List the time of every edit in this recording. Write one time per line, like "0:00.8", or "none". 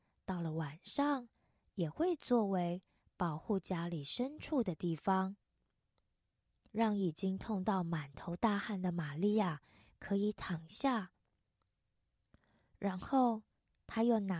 0:06.7